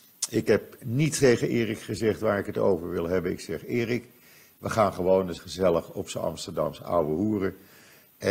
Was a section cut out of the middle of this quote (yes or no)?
yes